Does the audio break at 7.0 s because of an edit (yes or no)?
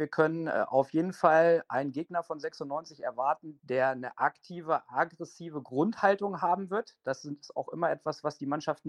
no